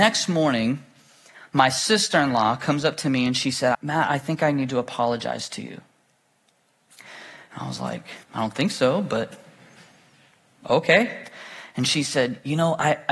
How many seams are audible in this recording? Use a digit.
2